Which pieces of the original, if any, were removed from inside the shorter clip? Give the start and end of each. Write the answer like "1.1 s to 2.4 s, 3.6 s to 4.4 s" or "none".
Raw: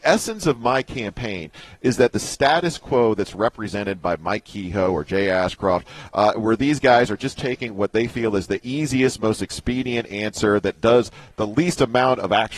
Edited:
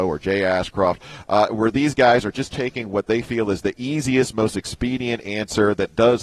none